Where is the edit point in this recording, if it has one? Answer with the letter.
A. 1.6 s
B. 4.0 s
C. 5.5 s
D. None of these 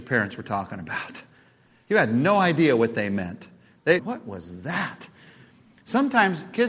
B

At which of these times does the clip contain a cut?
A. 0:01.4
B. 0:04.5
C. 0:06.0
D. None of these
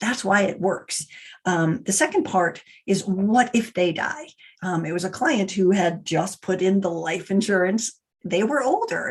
B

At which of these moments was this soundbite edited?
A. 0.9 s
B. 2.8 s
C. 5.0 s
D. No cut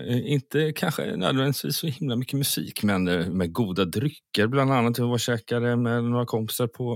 D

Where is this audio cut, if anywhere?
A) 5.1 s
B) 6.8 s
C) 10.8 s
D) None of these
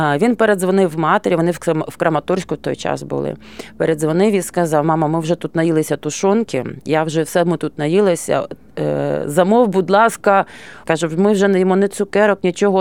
C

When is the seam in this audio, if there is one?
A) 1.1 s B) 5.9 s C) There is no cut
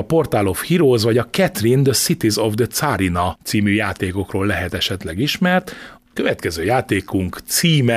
B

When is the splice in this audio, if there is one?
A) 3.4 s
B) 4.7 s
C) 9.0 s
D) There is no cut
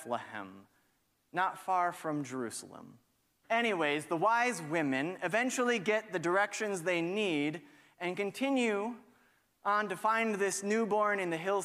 A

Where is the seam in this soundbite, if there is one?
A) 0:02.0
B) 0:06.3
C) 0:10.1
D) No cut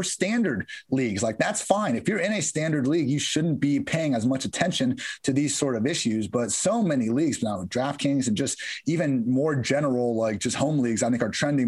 D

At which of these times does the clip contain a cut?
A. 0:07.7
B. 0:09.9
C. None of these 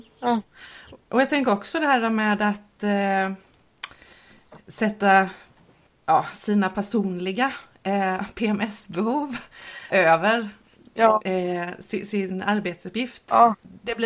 B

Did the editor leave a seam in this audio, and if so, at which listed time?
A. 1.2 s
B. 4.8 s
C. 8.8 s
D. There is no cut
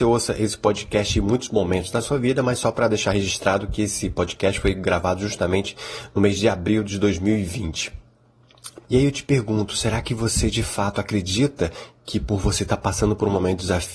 C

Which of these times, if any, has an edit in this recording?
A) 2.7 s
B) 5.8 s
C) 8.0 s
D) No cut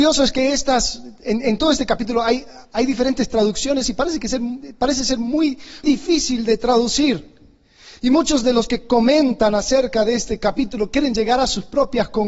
B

